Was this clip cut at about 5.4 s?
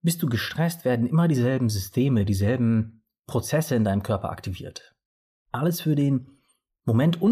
yes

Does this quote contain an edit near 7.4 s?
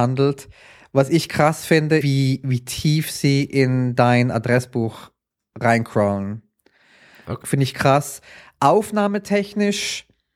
yes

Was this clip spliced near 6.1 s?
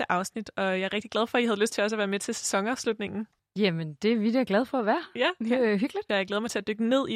yes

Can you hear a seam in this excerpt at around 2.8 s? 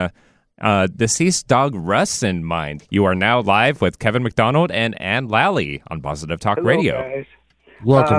yes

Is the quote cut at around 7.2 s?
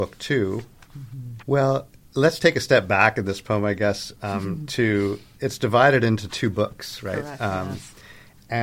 no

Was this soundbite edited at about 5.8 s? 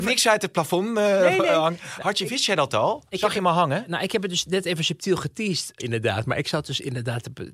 yes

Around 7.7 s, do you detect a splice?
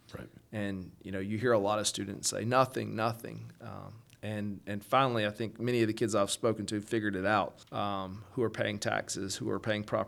yes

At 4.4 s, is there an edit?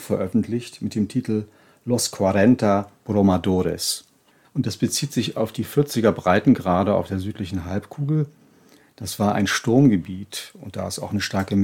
yes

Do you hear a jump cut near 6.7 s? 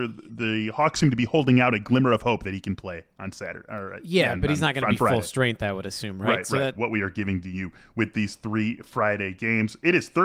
yes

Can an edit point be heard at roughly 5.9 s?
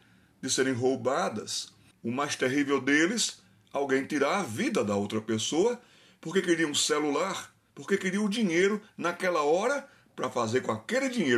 no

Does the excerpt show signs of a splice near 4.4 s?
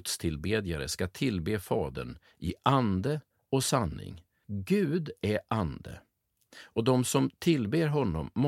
yes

